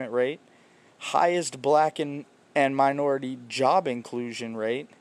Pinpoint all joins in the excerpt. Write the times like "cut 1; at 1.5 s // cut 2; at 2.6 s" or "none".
none